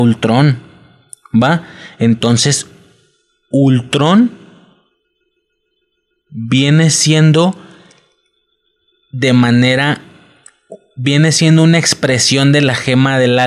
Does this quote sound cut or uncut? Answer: uncut